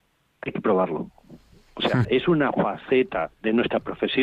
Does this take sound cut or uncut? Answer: cut